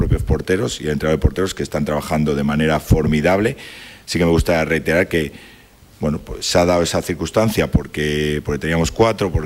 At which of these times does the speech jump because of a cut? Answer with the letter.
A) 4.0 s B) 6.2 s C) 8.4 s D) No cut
D